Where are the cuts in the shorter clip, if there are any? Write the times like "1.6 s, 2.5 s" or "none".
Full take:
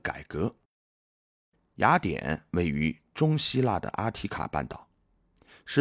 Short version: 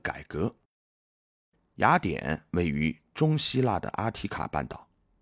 none